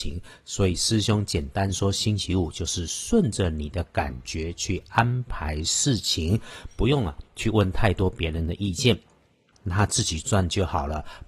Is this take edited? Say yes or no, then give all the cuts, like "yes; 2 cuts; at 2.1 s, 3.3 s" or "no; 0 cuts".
yes; 1 cut; at 9.5 s